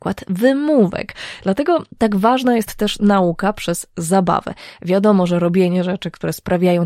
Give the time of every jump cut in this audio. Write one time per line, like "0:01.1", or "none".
none